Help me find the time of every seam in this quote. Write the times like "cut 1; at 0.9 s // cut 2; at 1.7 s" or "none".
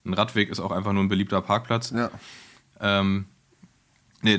none